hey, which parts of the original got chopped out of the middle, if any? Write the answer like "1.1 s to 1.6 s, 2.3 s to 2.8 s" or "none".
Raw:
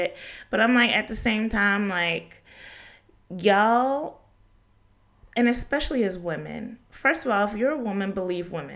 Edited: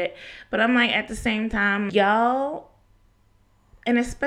1.9 s to 3.4 s